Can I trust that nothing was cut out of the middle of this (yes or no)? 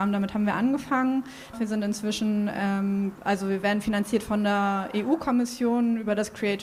no